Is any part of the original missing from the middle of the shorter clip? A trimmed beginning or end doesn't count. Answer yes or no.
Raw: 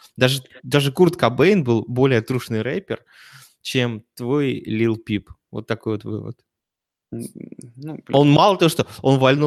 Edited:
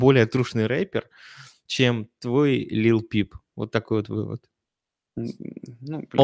no